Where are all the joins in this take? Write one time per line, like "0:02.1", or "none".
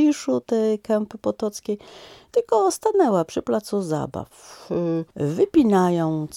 0:05.1